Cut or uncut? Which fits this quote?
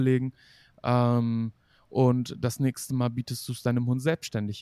uncut